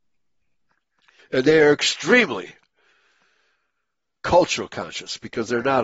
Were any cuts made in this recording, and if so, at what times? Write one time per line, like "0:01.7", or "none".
0:01.2

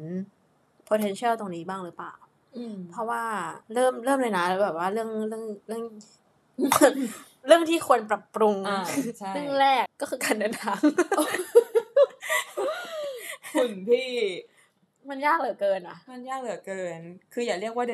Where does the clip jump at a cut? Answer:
0:03.6
0:09.9

